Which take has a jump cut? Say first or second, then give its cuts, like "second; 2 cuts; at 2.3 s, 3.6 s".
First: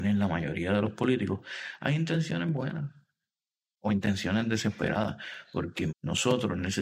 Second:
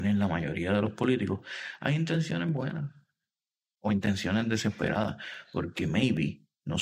first; 1 cut; at 5.9 s